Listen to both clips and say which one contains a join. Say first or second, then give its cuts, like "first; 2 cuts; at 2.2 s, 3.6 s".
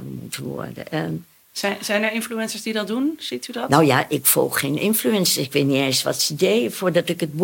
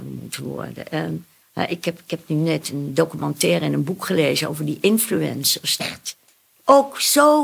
second; 2 cuts; at 1.4 s, 5.8 s